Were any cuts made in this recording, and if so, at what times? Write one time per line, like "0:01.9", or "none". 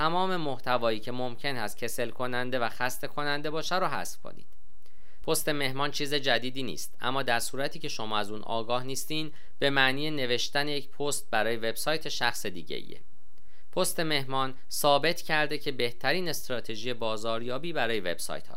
0:05.2